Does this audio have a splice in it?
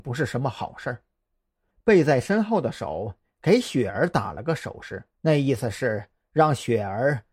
yes; 2 cuts; at 1.7 s, 5.1 s

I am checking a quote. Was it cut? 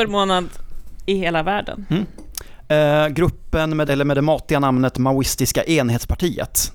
yes; 1 cut; at 3.8 s

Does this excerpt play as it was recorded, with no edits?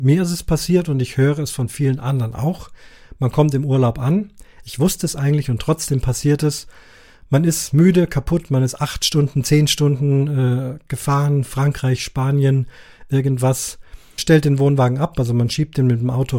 no; 2 cuts; at 4.6 s, 14.2 s

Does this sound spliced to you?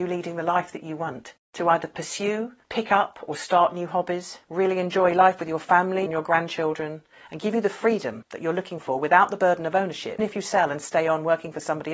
yes; 2 cuts; at 6.1 s, 10.2 s

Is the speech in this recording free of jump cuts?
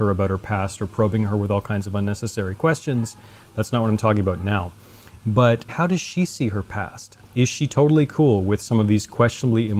no; 2 cuts; at 5.7 s, 7.2 s

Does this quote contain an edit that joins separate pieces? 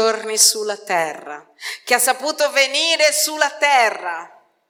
no; 0 cuts

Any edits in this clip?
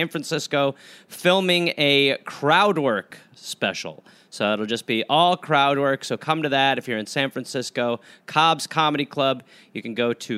no; 0 cuts

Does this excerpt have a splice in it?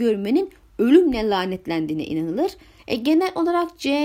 yes; 1 cut; at 2.8 s

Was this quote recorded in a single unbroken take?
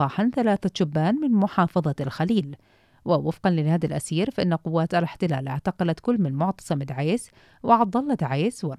yes; 0 cuts

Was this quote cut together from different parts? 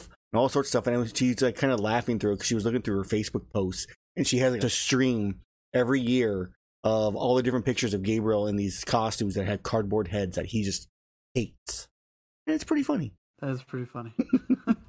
yes; 2 cuts; at 4.6 s, 13.2 s

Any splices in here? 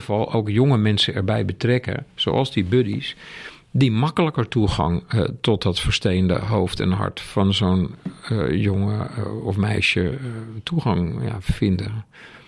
no; 0 cuts

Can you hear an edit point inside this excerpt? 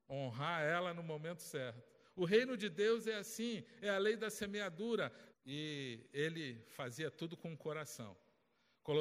yes; 1 cut; at 5.3 s

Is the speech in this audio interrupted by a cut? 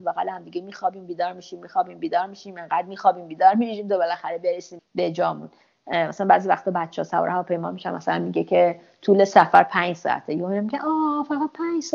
yes; 1 cut; at 4.8 s

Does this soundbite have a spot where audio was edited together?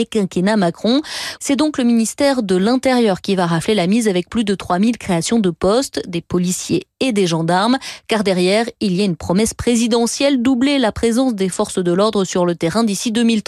yes; 1 cut; at 1.4 s

